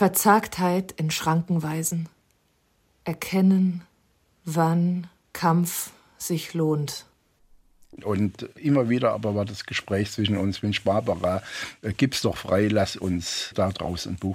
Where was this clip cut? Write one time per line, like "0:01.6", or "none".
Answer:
0:08.0